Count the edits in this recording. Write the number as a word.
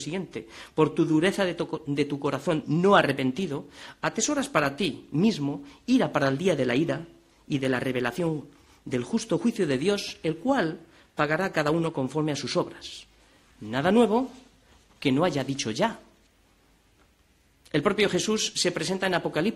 zero